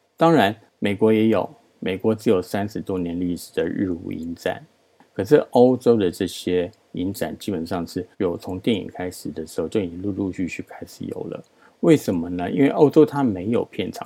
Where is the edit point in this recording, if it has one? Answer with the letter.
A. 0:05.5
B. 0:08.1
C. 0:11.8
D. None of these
B